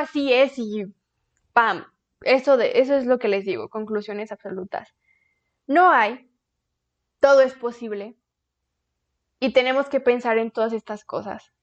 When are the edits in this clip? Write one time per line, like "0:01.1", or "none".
none